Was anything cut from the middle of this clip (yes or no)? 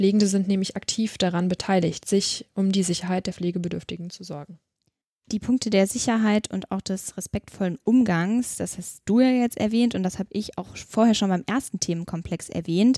no